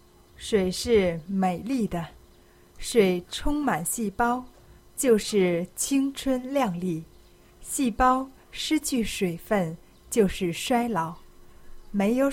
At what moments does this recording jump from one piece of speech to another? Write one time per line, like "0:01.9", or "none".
none